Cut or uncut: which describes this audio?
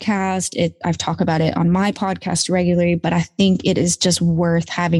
uncut